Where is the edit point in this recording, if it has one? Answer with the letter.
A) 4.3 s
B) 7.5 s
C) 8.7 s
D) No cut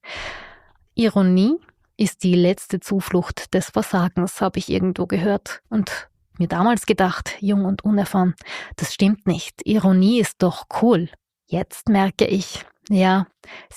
D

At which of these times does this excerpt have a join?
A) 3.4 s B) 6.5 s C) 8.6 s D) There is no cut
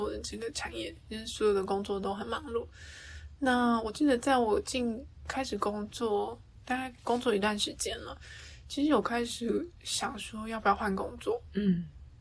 D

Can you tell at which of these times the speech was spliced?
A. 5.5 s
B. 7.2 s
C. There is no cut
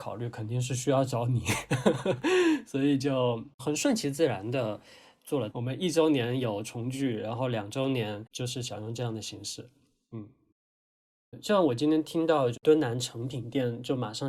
A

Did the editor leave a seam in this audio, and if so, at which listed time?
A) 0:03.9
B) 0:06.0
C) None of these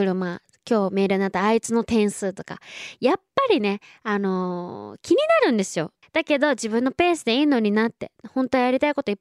B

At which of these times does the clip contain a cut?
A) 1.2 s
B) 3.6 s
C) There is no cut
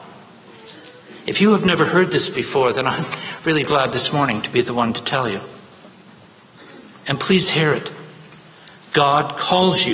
B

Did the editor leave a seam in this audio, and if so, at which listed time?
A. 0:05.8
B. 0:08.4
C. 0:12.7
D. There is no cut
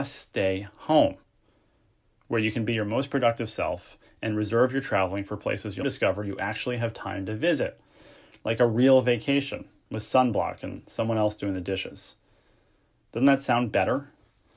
A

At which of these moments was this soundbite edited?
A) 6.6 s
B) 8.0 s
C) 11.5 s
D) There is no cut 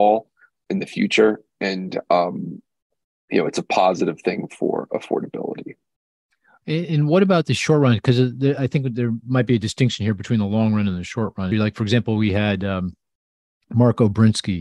C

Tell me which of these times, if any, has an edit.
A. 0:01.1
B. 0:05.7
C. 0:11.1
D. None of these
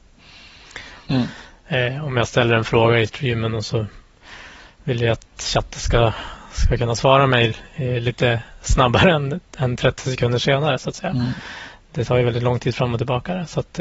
A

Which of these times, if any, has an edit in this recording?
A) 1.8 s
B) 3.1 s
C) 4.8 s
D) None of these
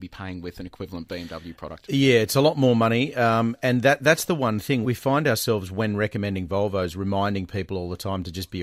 C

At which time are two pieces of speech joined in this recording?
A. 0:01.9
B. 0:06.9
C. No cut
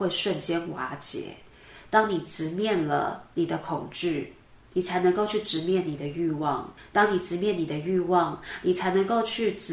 C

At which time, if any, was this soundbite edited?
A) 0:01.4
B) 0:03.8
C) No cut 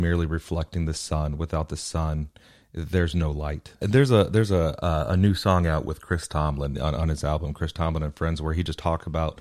B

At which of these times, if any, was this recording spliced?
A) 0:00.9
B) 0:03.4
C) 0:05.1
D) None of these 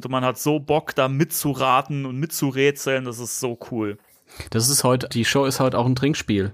C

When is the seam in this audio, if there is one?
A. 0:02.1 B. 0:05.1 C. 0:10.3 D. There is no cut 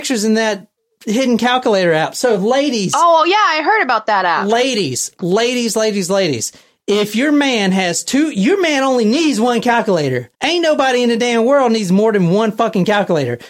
C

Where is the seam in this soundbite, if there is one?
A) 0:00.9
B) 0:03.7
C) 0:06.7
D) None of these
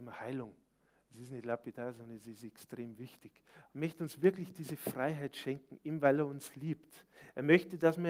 B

